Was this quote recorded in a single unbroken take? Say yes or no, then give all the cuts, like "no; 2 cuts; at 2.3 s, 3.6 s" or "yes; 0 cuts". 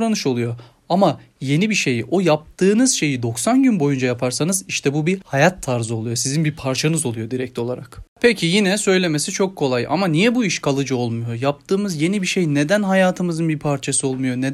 yes; 0 cuts